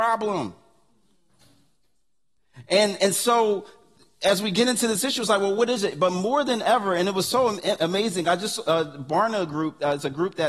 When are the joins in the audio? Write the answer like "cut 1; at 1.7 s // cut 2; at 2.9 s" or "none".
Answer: none